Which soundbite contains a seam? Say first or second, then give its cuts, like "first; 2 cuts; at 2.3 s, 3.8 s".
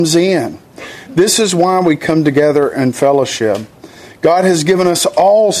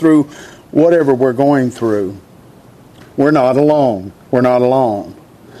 second; 1 cut; at 4.2 s